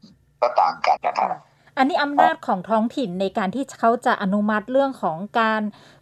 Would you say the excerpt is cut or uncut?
cut